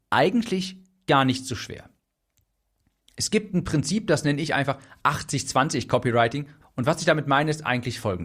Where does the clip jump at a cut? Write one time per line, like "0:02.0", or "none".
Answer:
0:06.6